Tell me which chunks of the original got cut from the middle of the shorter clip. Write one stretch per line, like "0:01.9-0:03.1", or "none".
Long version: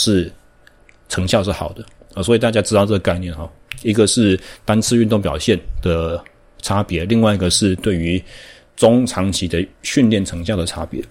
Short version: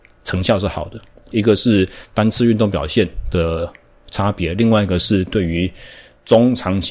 0:02.2-0:03.8